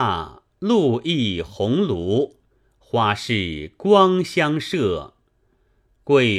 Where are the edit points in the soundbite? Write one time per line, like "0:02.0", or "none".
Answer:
none

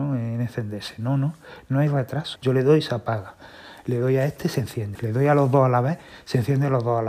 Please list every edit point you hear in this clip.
0:02.4
0:04.9

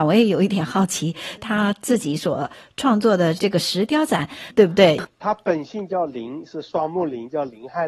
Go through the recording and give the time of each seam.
0:01.4
0:04.5

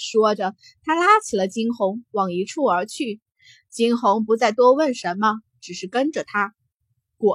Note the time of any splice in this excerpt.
none

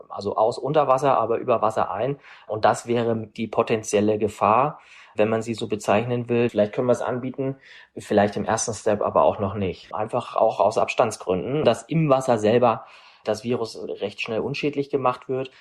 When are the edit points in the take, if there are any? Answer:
0:06.5
0:09.9
0:11.6

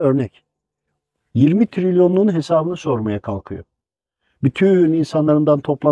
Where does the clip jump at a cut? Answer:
none

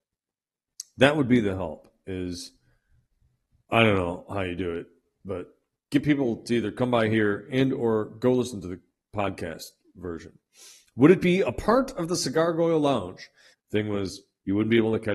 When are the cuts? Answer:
0:13.5

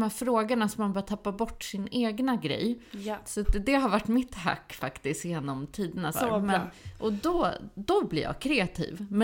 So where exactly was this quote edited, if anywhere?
0:06.1

